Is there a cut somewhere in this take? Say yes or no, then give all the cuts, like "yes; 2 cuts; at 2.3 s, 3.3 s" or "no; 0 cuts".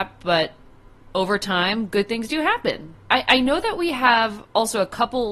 yes; 1 cut; at 2.9 s